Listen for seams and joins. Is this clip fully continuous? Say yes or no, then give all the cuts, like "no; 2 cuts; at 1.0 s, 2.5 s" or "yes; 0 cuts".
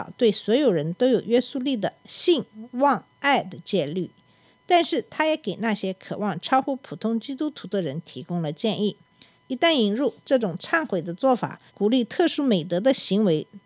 no; 2 cuts; at 9.4 s, 11.7 s